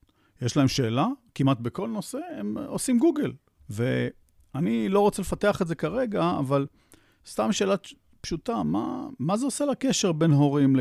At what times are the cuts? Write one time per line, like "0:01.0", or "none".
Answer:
0:03.6